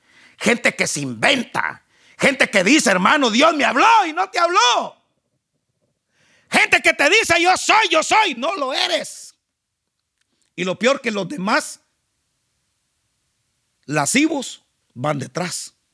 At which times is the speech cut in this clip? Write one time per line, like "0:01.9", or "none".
none